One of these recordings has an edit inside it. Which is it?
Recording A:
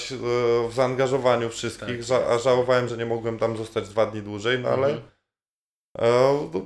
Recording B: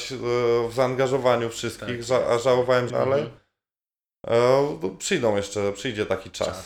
B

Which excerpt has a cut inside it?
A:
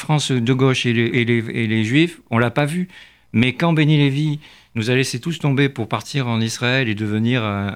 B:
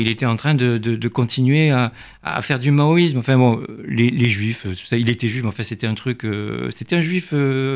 A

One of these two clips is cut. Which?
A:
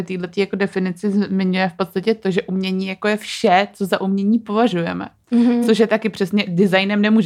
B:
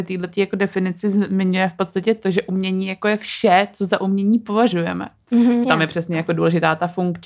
B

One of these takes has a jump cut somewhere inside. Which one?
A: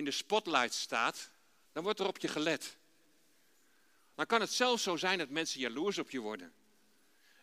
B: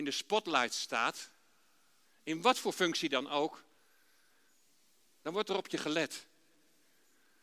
A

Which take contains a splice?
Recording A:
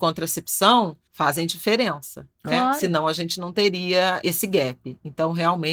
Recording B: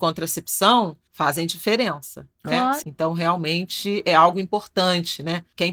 B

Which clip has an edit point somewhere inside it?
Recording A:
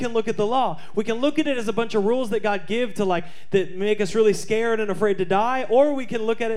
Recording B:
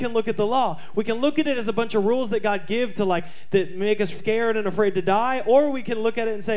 B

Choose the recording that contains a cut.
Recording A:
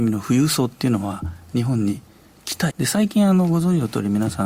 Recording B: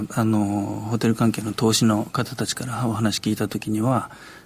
A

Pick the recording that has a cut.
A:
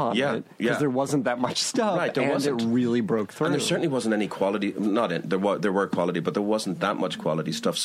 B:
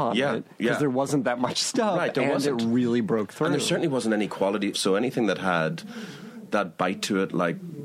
B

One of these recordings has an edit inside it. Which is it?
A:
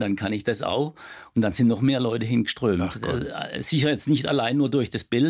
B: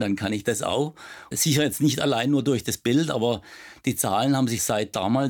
B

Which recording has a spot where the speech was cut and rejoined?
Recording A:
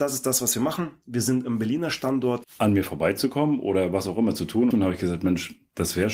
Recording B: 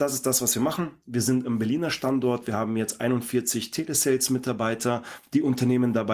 A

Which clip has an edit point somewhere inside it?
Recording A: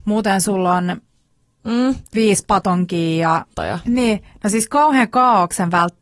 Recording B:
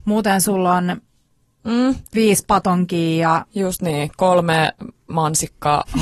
A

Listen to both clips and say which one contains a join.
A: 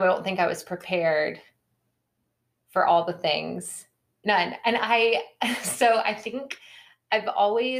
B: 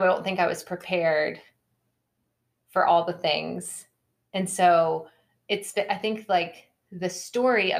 A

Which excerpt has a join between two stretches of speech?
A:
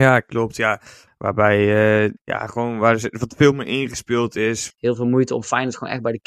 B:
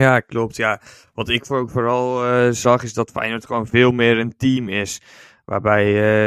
A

